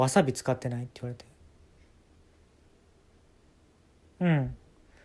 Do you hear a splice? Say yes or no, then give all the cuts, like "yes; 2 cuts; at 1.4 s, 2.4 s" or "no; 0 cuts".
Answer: no; 0 cuts